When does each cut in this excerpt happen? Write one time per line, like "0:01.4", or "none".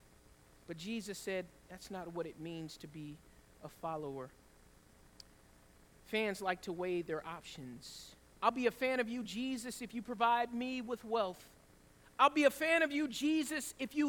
0:08.4